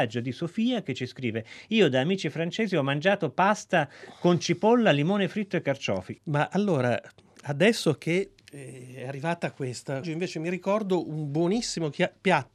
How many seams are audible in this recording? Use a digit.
3